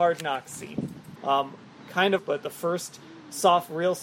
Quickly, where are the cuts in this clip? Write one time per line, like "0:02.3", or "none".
0:01.2
0:02.2